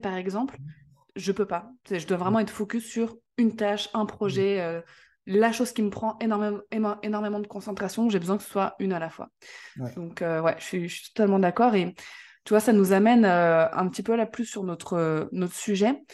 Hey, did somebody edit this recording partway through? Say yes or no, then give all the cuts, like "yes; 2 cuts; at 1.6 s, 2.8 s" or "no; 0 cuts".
no; 0 cuts